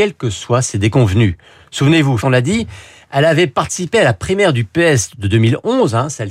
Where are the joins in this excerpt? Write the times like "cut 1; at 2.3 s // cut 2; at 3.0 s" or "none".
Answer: cut 1; at 2.2 s